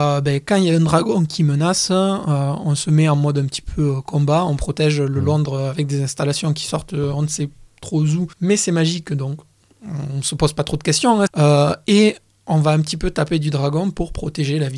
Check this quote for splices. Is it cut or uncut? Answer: cut